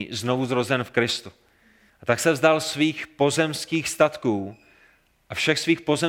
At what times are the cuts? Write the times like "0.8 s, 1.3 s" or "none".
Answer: 1.9 s